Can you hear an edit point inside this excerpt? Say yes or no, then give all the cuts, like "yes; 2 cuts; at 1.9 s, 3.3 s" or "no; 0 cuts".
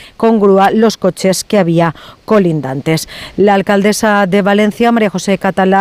no; 0 cuts